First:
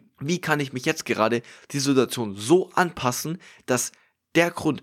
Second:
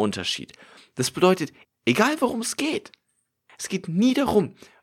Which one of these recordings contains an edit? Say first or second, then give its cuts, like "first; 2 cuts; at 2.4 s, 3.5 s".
second; 1 cut; at 1.6 s